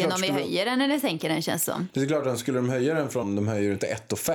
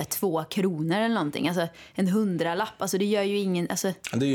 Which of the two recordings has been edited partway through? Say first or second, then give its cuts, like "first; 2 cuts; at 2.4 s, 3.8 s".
first; 1 cut; at 3.2 s